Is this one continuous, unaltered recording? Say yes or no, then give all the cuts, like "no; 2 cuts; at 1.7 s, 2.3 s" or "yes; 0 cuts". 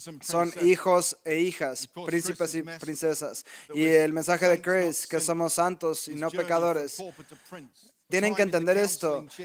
no; 1 cut; at 8.1 s